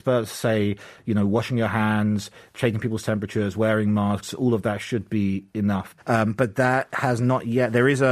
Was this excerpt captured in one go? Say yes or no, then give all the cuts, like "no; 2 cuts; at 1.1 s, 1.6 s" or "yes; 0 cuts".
no; 1 cut; at 6.0 s